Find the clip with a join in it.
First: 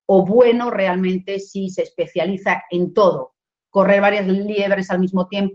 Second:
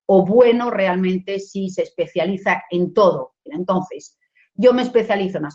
second; 1 cut; at 3.5 s

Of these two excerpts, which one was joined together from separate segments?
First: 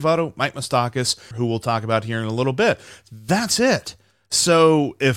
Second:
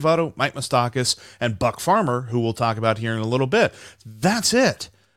first; 1 cut; at 1.3 s

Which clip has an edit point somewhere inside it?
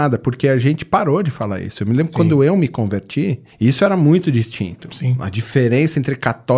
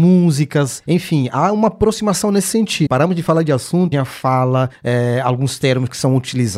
second; 2 cuts; at 2.9 s, 3.9 s

